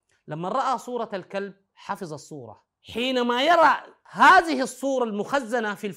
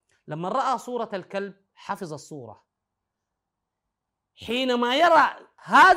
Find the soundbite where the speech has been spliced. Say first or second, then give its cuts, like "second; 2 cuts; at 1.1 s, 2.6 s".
first; 1 cut; at 2.7 s